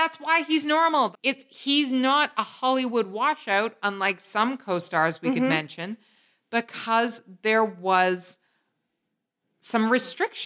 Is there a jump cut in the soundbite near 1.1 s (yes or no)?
yes